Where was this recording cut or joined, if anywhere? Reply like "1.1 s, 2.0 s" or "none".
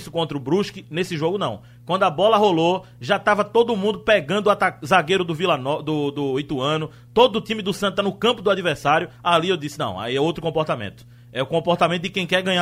none